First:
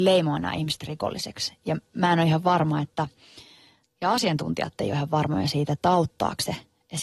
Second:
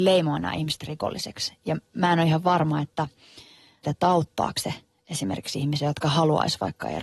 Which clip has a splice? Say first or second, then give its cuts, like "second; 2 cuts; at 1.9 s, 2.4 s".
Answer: second; 1 cut; at 3.8 s